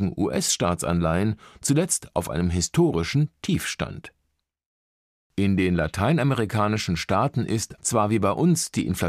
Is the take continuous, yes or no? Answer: no